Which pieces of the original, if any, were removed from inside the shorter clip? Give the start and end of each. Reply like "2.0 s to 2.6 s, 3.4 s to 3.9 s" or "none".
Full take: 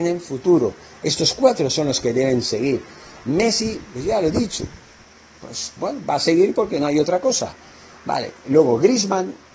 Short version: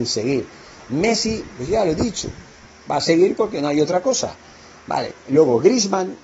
5.2 s to 6.0 s

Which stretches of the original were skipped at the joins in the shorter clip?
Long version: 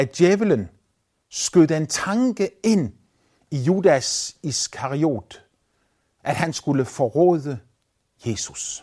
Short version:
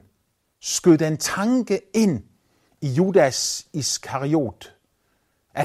none

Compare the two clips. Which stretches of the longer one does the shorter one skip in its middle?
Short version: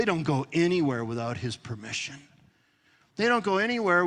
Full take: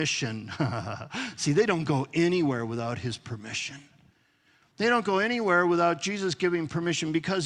none

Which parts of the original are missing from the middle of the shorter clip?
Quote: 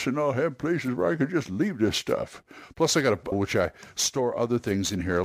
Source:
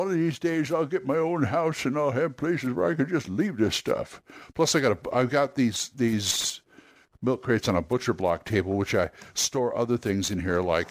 5.1 s to 8.7 s

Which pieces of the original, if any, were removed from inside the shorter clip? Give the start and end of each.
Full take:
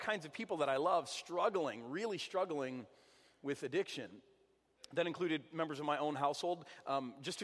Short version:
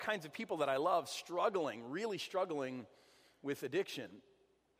none

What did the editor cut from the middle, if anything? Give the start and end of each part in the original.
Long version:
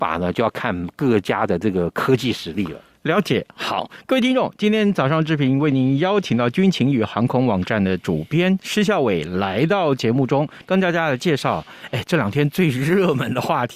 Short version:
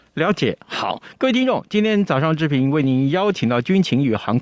none

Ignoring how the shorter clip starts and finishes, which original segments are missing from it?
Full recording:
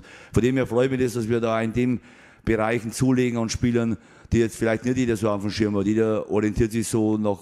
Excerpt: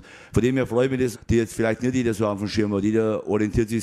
1.1 s to 4.2 s

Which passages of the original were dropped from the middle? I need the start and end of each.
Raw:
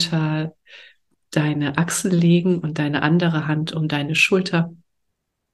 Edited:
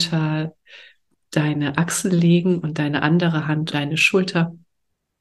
3.7 s to 3.9 s

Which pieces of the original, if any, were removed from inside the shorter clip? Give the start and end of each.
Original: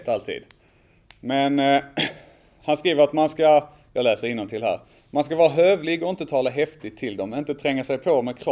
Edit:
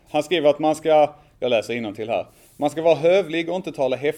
none

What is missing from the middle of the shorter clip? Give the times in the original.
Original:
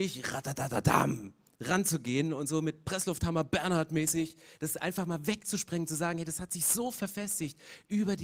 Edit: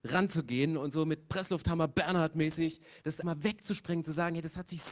4.8 s to 5.1 s

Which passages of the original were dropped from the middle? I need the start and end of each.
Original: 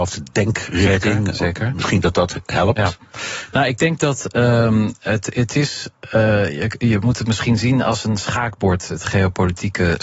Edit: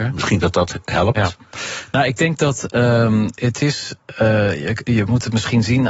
5.0 s to 5.3 s

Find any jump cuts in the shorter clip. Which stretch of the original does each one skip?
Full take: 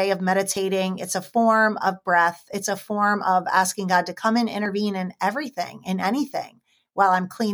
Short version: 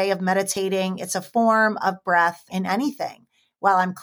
2.5 s to 5.8 s

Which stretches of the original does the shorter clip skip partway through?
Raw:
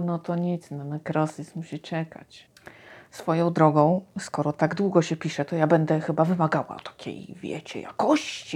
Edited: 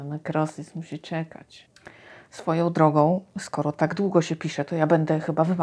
none

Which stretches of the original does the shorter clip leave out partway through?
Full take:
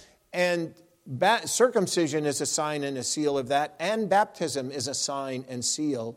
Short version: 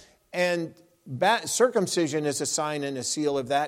none

